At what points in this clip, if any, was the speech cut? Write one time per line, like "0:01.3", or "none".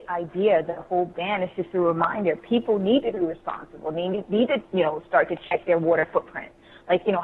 none